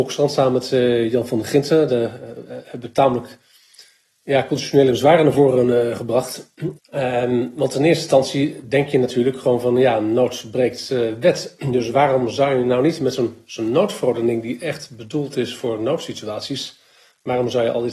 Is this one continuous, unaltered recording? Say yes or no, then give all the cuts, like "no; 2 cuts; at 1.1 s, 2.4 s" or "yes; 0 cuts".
no; 1 cut; at 6.7 s